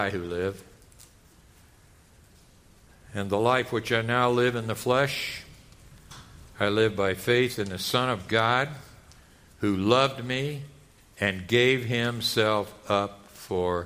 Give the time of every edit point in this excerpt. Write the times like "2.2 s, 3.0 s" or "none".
none